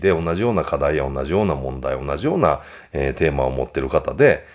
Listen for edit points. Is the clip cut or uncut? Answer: uncut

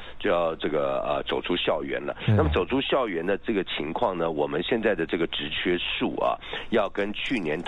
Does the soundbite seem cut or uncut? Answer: uncut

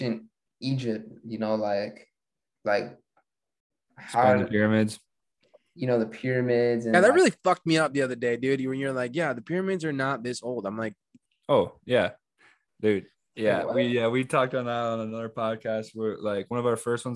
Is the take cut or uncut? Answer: uncut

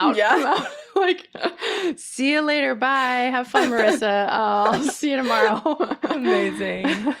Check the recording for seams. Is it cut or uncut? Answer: uncut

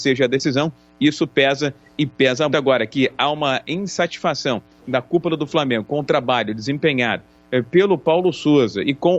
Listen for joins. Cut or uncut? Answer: cut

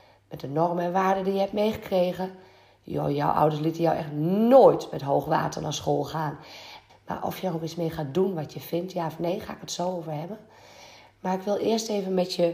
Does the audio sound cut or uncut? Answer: cut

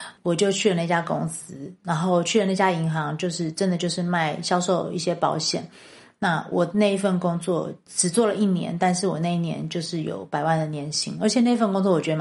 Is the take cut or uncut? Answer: uncut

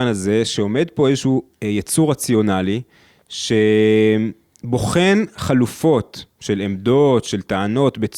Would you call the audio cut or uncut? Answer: uncut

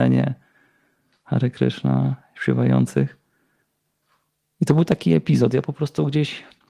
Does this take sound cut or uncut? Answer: uncut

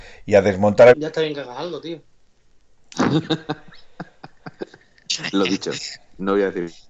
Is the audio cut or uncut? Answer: cut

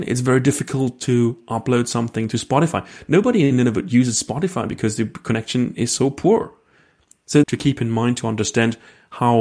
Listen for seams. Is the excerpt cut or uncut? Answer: cut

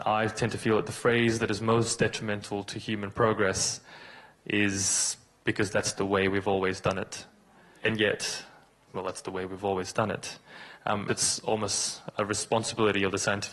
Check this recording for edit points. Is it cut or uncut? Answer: cut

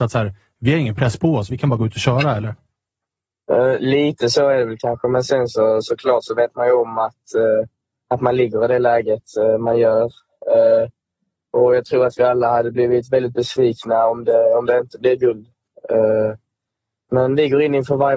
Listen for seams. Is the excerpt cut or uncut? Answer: uncut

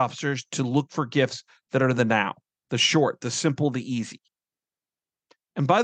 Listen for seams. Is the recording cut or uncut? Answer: uncut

